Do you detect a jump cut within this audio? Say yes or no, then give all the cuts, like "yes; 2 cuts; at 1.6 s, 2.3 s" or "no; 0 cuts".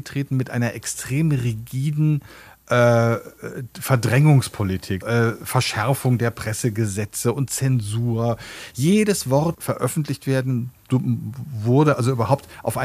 yes; 2 cuts; at 5.0 s, 9.5 s